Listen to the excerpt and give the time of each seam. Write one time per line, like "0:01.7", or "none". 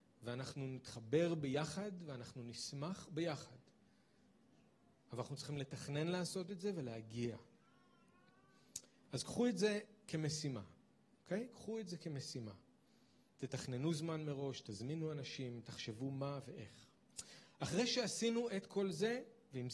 0:13.3